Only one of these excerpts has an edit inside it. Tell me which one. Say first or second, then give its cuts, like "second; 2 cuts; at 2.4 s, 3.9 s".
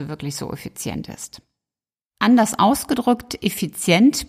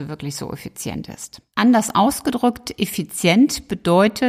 second; 1 cut; at 1.5 s